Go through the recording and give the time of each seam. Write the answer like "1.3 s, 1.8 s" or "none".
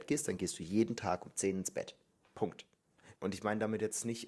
3.2 s